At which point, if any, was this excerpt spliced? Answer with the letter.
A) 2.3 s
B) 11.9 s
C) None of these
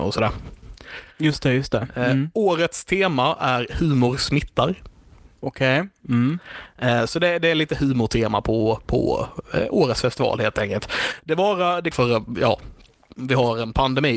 B